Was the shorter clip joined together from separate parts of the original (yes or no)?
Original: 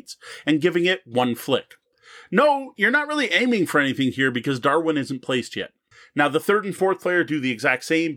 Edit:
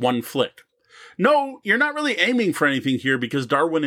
no